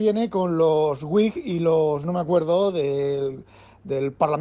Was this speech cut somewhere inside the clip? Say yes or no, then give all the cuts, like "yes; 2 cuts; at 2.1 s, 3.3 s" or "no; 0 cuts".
no; 0 cuts